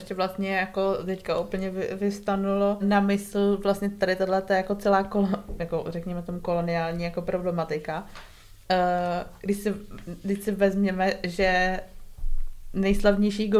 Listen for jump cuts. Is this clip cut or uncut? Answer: cut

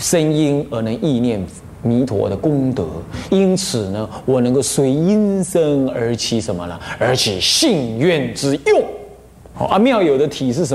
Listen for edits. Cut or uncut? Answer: cut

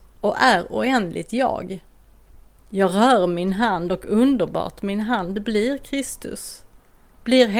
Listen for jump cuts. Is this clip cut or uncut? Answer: uncut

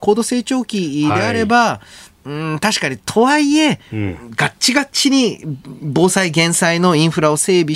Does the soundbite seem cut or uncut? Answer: uncut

